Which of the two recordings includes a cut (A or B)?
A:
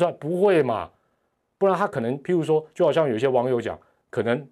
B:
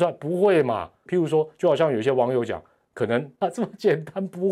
B